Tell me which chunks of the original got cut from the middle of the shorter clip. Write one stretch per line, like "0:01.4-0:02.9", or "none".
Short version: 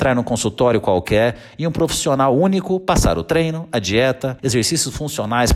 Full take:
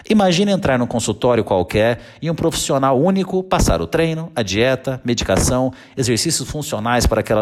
0:05.0-0:05.9